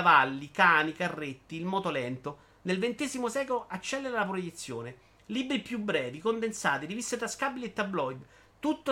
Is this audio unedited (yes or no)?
yes